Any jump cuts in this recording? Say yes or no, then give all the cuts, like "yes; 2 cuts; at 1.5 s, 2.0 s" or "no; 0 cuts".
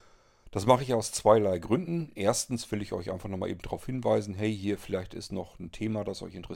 no; 0 cuts